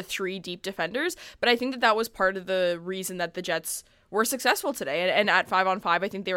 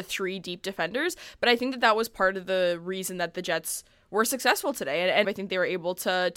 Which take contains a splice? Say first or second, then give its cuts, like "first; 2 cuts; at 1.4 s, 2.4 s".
second; 1 cut; at 5.2 s